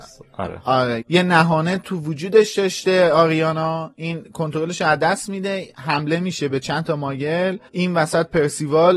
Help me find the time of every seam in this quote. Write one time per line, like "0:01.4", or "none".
0:01.0
0:07.7